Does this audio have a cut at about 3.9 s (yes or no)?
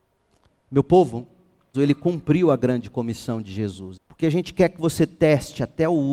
yes